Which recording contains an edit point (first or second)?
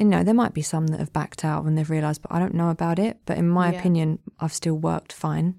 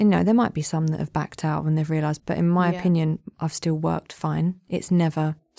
second